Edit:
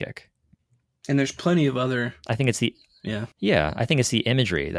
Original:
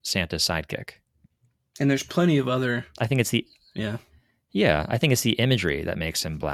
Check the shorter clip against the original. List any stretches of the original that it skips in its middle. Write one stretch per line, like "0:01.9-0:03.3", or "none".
0:04.0-0:04.4